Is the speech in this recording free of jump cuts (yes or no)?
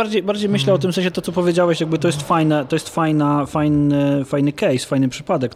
yes